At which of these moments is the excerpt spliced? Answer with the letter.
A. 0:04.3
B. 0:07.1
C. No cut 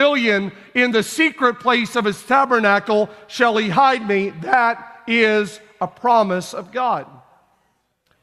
C